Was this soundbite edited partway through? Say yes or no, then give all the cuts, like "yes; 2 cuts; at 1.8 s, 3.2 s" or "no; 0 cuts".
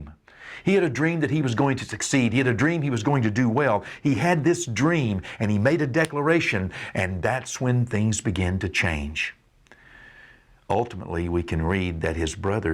no; 0 cuts